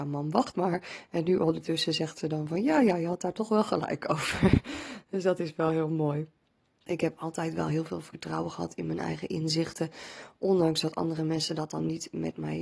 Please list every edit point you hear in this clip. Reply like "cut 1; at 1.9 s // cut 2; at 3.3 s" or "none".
none